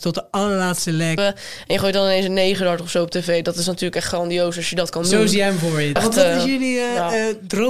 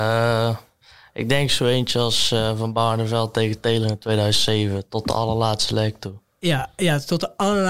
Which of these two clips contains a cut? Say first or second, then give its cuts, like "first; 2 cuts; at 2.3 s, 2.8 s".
first; 2 cuts; at 1.2 s, 6.0 s